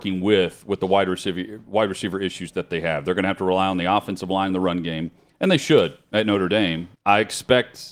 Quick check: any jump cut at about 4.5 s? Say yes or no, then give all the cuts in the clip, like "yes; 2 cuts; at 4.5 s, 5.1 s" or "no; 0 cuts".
no; 1 cut; at 6.9 s